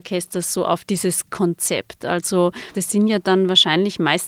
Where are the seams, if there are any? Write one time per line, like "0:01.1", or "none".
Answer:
0:02.7